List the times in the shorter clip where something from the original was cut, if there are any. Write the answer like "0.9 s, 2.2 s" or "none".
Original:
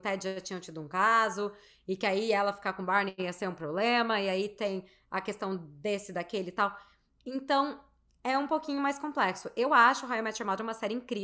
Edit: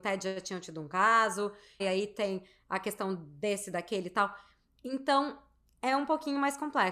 1.8 s